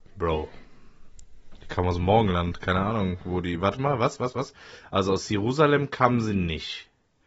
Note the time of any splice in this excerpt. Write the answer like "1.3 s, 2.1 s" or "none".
none